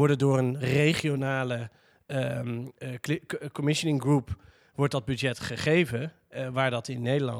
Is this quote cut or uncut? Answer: uncut